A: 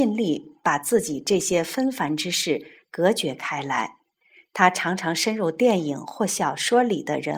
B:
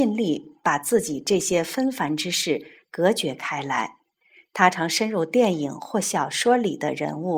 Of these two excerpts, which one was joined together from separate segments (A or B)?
B